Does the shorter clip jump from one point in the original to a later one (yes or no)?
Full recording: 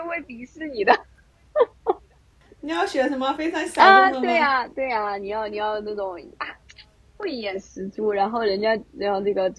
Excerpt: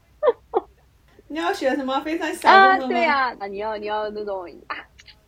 yes